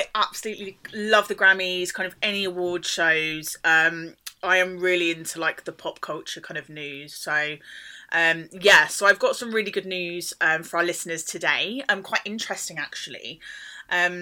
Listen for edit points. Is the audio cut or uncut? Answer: uncut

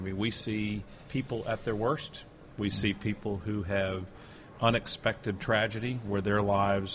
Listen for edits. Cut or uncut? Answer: cut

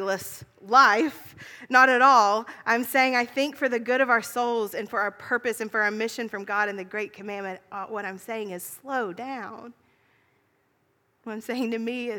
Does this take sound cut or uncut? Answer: uncut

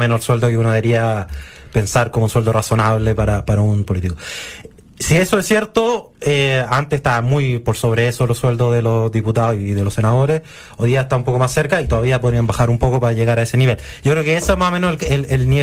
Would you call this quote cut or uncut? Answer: uncut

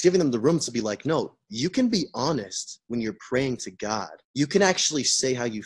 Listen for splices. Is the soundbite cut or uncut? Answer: cut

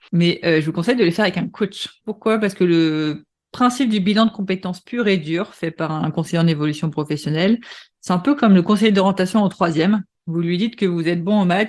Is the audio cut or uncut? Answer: uncut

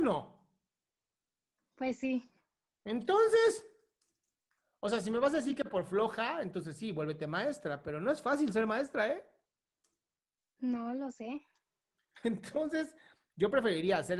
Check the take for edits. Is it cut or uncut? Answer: uncut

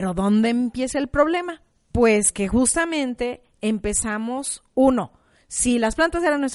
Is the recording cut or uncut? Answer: uncut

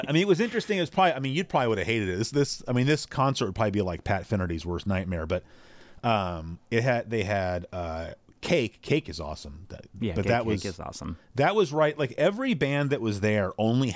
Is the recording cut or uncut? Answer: uncut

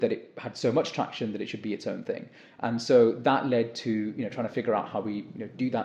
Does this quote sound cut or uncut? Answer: uncut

